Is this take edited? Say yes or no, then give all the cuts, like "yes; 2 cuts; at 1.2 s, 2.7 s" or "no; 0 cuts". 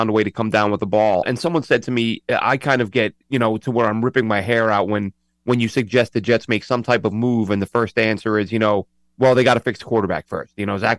yes; 2 cuts; at 1.2 s, 3.2 s